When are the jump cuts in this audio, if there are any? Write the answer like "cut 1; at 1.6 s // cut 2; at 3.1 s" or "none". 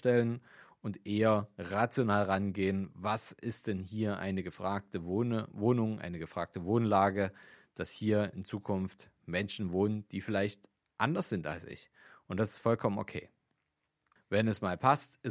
cut 1; at 14.2 s